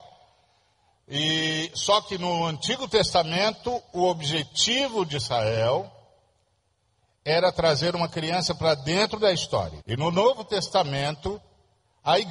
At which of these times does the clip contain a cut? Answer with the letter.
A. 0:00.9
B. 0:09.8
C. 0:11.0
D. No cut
B